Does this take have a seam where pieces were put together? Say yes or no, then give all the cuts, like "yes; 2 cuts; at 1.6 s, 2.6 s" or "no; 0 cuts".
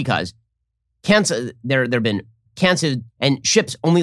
yes; 1 cut; at 3.1 s